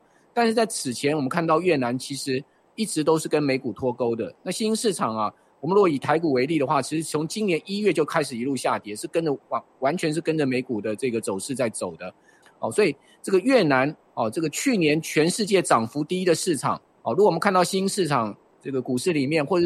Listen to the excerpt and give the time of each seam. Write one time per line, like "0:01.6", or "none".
0:12.4